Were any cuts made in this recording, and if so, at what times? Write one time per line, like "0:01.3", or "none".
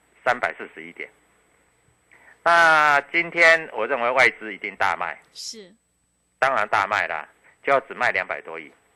0:07.4

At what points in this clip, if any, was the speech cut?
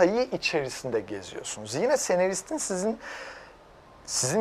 none

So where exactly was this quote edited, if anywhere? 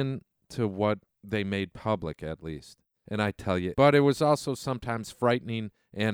0:03.7

